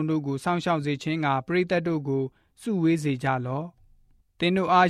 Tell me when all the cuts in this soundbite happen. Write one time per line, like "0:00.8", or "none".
none

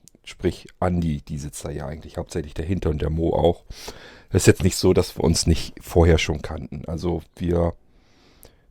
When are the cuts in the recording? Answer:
none

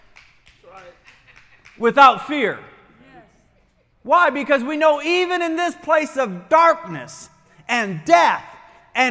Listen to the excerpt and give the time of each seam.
none

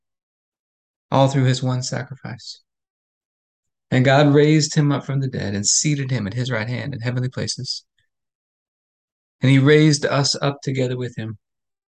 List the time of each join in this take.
none

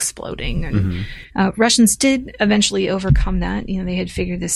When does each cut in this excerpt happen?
0:01.3

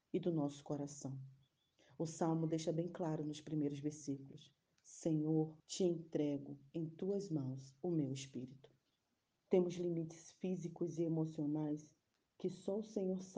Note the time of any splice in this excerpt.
0:05.6
0:09.3

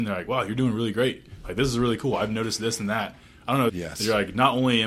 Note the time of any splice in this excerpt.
0:03.7

